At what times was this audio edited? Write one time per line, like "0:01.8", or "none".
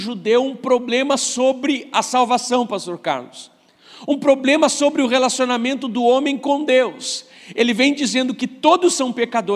none